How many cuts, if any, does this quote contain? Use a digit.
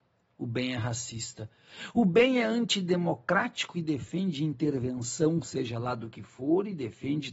0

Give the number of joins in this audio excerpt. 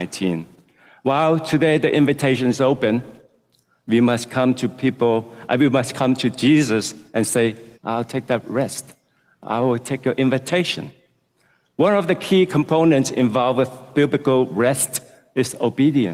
1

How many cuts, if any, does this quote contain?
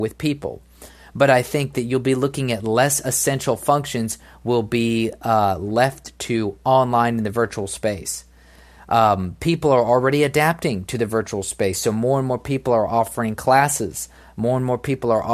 0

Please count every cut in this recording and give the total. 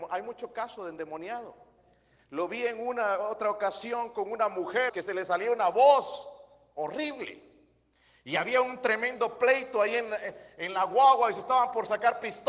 1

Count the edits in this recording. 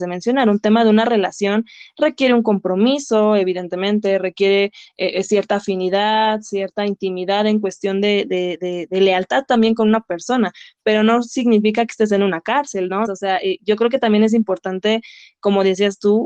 1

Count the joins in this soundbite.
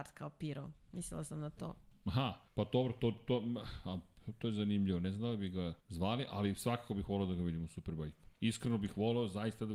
2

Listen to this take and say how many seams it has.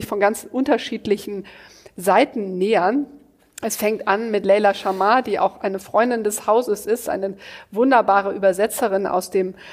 0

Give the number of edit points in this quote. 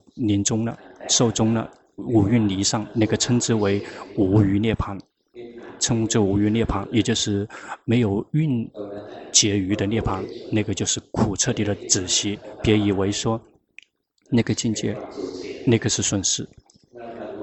0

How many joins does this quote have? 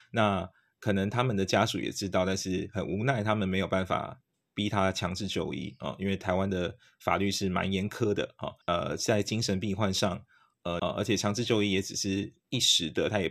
2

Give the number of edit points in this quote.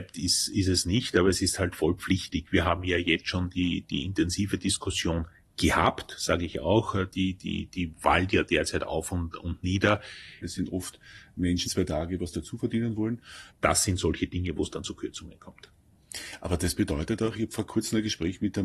3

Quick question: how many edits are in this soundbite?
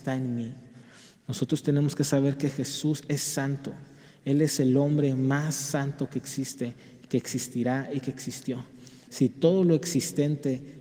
1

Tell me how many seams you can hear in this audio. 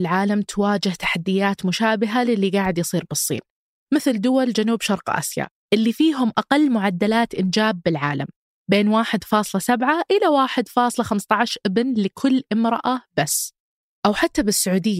1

